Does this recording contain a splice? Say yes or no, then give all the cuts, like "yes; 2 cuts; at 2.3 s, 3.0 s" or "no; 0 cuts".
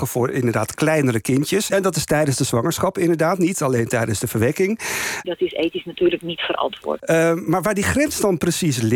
yes; 3 cuts; at 1.7 s, 5.2 s, 7.0 s